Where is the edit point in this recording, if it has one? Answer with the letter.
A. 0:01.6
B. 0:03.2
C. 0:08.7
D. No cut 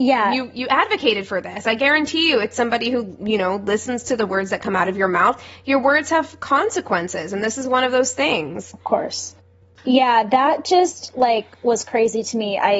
D